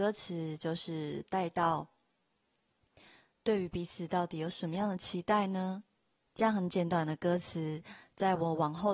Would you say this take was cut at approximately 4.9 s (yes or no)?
no